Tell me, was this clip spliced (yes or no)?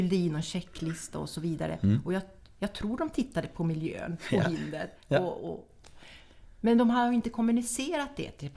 no